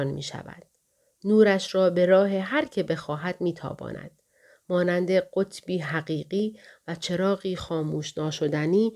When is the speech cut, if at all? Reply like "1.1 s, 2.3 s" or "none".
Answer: none